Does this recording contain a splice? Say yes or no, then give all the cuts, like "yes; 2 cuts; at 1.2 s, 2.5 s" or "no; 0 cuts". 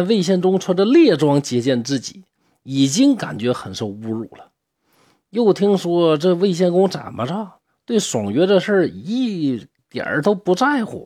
no; 0 cuts